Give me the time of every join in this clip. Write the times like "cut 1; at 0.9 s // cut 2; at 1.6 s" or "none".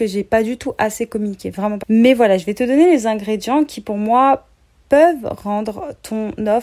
cut 1; at 1.8 s